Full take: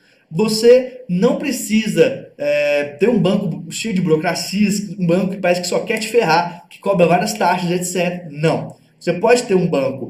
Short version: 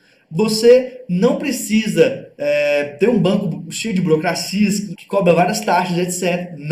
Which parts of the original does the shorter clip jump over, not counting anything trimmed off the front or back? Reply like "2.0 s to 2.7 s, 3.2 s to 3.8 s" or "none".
5.0 s to 6.7 s

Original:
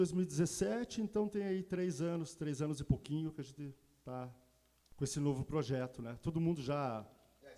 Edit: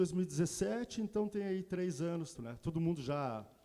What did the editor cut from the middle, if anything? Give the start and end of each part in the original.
2.3 s to 5.9 s

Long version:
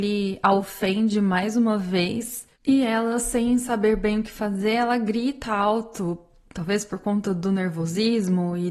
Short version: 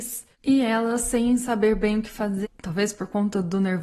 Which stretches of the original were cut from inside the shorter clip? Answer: 4.6 s to 6.3 s

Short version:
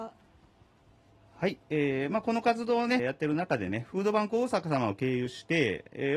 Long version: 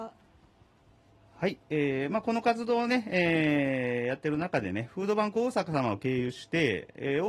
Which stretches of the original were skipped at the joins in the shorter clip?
3.0 s to 4.0 s

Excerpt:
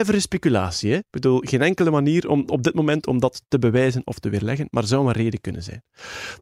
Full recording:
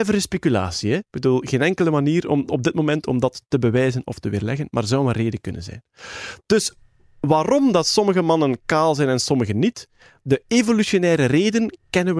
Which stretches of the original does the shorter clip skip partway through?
none

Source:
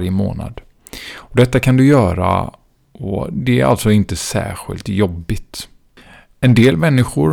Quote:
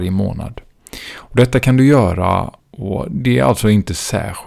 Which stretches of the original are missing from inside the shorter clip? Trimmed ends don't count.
2.6 s to 2.8 s

